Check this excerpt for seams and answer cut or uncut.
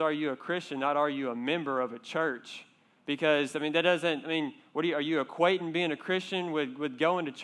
uncut